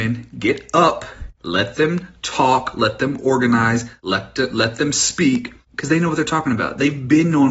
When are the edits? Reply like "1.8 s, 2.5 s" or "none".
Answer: 1.4 s